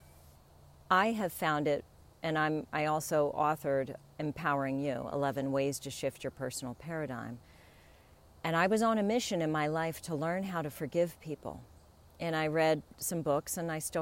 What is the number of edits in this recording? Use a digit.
0